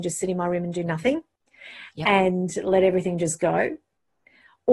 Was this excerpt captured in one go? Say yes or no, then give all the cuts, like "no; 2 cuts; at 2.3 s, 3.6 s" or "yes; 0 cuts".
yes; 0 cuts